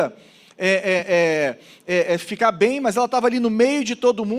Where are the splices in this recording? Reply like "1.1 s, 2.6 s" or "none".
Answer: none

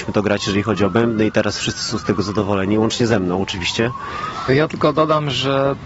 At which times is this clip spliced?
4.5 s

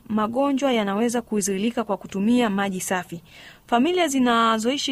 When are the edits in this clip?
none

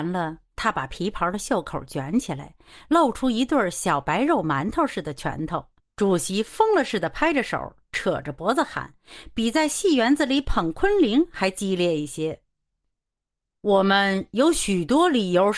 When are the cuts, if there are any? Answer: 5.8 s

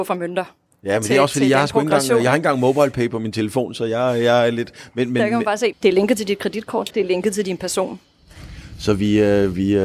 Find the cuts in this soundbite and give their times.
5.7 s, 6.9 s

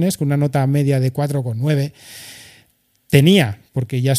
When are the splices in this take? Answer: none

